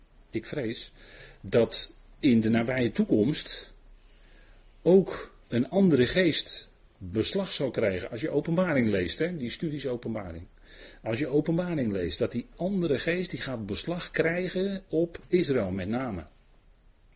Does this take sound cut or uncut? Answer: cut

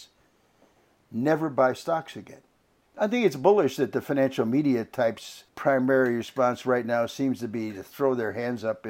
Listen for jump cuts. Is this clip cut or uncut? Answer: cut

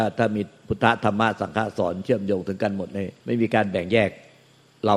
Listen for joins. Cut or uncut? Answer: cut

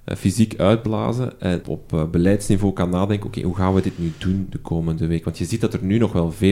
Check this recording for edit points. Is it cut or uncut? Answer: cut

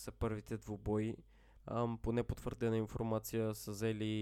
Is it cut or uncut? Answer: cut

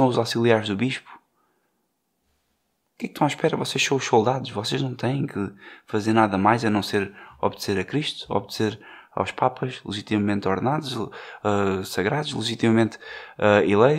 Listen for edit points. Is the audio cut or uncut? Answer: uncut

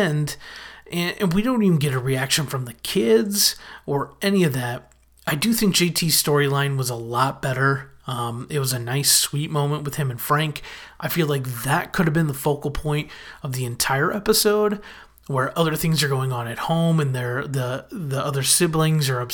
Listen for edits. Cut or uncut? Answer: uncut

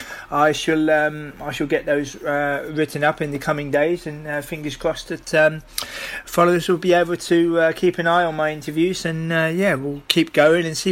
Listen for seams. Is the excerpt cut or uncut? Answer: uncut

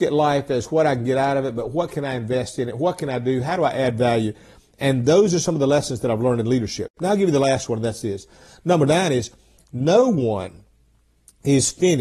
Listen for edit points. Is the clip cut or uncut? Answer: uncut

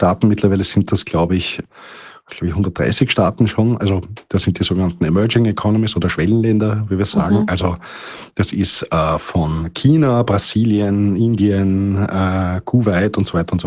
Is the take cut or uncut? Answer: uncut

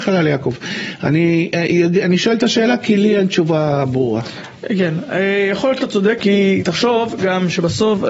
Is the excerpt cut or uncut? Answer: cut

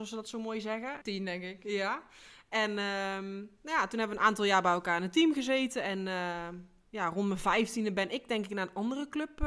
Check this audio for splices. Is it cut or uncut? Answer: cut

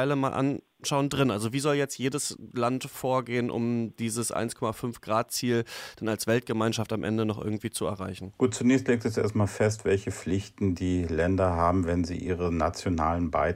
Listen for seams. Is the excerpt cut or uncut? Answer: uncut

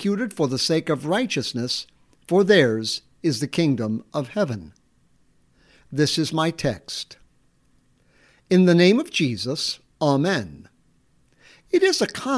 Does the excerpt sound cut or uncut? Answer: uncut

